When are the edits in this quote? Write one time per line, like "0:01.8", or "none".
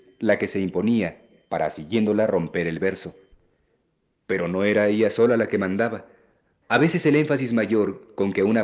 none

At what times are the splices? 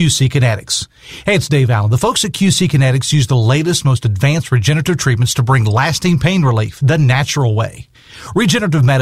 none

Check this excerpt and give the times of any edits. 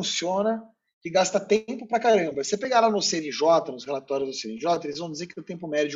none

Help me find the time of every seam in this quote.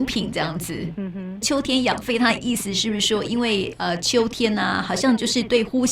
0:01.4

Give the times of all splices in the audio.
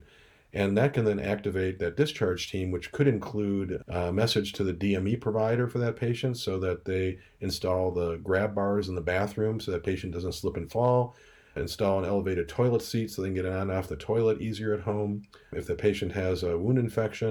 none

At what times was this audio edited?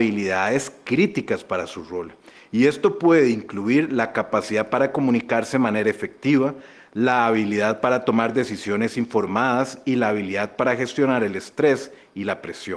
none

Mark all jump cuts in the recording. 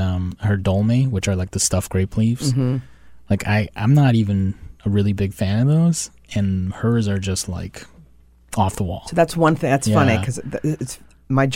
none

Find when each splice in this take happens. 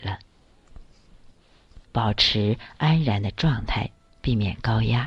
0:01.8

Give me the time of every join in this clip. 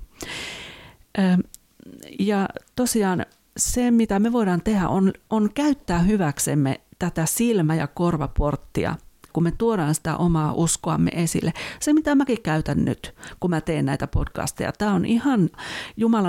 0:09.3

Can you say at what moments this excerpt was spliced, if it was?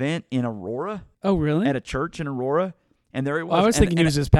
0:01.1

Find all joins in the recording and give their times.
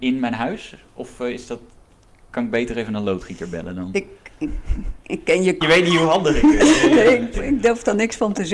0:05.6
0:07.3

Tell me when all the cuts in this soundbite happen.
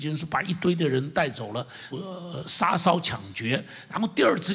0:01.9

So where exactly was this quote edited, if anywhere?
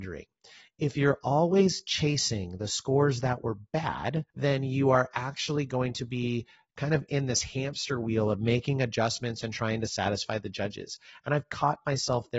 0:04.3

